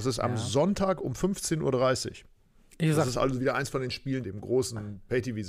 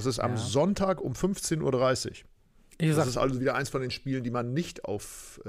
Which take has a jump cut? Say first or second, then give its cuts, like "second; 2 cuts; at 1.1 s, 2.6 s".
first; 1 cut; at 4.2 s